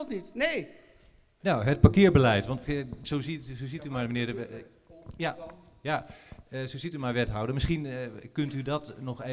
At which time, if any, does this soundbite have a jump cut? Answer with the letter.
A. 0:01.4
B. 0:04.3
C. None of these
A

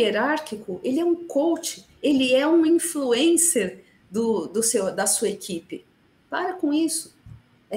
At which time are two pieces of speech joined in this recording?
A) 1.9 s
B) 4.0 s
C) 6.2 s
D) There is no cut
C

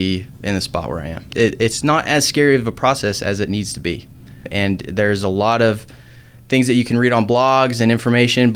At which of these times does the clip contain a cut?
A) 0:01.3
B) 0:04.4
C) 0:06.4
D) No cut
A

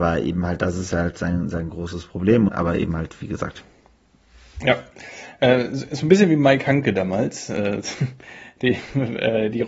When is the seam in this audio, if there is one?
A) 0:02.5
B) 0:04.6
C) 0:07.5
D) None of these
A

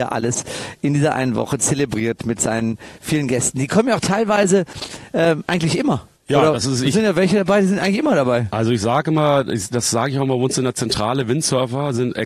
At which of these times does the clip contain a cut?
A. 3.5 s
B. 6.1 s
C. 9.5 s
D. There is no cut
B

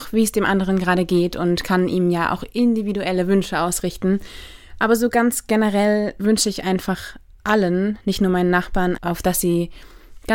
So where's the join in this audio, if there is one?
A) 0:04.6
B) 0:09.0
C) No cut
B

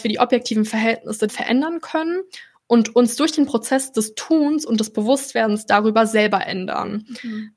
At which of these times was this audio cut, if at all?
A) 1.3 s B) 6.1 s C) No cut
A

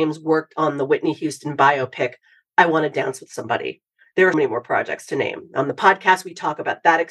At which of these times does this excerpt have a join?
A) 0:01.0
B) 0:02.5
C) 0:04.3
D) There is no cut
C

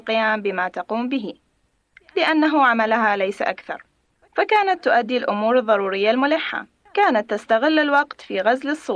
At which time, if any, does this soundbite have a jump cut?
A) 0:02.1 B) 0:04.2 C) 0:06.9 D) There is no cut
C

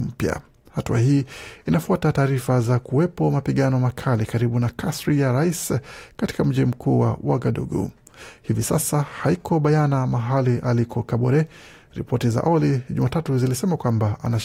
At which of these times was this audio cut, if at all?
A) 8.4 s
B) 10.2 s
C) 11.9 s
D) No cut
D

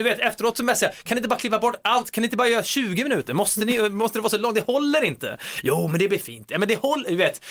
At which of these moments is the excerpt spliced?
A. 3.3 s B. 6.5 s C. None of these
C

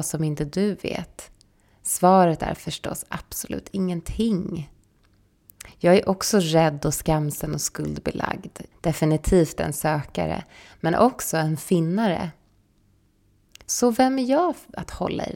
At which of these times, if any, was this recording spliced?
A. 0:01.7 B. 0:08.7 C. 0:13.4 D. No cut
B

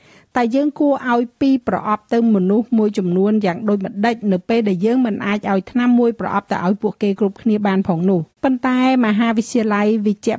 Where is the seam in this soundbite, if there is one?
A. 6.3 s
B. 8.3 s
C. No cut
B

